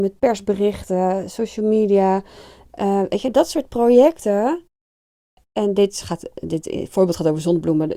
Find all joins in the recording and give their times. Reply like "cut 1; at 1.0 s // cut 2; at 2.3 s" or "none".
none

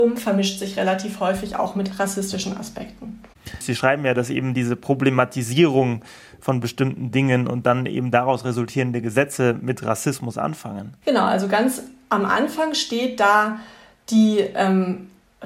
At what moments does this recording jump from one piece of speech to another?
cut 1; at 3.6 s

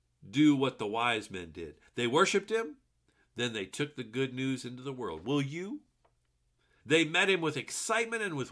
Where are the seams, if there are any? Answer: cut 1; at 6.8 s

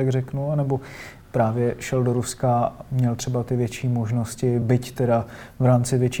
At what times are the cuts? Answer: none

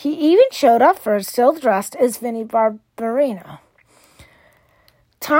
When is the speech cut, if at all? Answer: none

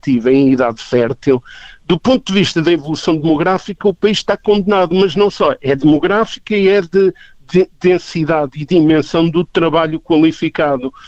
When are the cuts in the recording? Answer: none

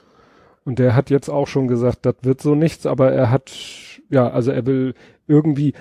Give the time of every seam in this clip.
none

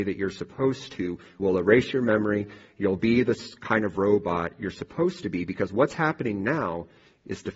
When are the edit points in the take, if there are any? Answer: cut 1; at 1.4 s

